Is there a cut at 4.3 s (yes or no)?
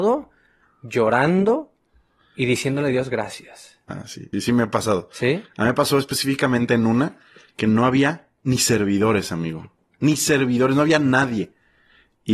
yes